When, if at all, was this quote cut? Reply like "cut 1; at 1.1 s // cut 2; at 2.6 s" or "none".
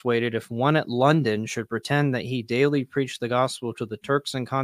none